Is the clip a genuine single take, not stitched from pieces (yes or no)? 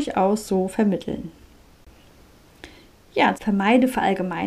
no